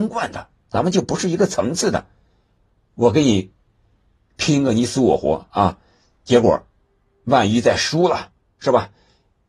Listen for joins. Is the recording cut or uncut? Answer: uncut